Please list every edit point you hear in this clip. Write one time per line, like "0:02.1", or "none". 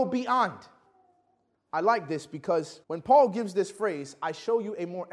0:01.5
0:02.8

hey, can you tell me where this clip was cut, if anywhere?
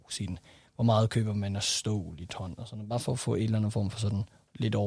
none

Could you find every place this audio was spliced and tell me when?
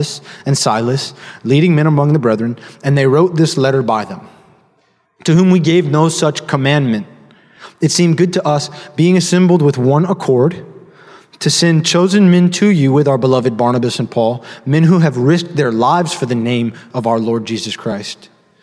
0:05.0

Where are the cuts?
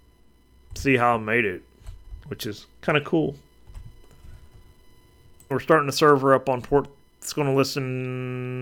0:05.5

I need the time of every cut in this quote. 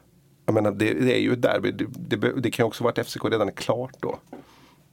none

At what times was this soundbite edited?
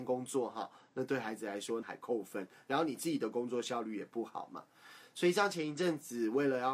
0:01.8

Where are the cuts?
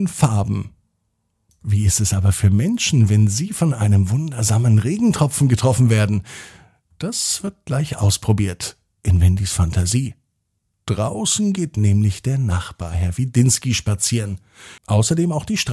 0:14.8

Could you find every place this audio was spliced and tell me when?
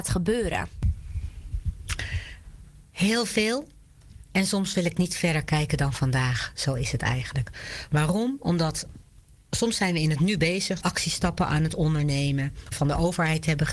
0:10.8
0:12.7

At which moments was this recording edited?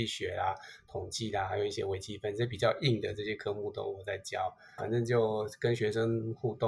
0:04.8

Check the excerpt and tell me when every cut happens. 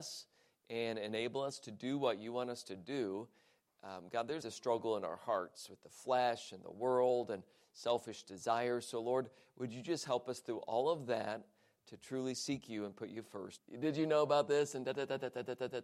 0:04.4
0:13.6

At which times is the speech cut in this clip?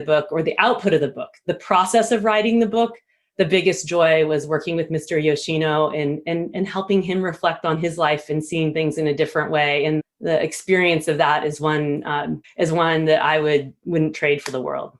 0:10.0
0:12.4

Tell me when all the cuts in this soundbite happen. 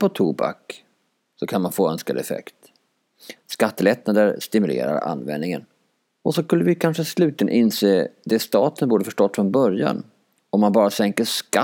0:03.4
0:06.1

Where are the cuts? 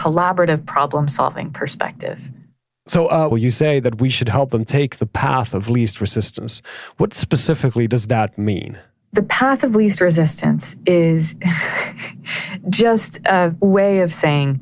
0:03.3

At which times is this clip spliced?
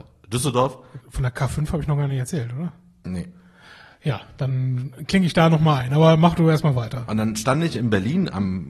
0:01.0

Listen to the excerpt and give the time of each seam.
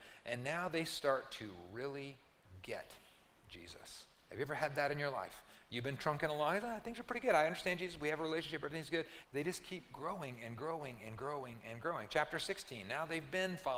0:09.2

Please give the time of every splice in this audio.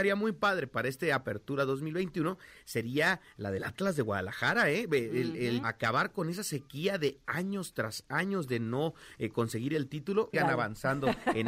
0:05.6
0:10.3

